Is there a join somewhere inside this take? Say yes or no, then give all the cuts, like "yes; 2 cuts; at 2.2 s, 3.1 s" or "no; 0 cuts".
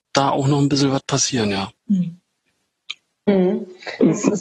yes; 1 cut; at 1.8 s